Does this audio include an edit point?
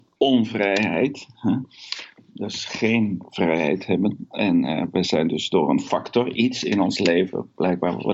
no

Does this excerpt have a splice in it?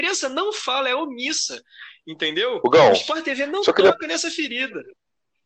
no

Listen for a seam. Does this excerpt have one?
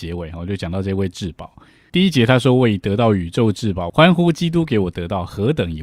yes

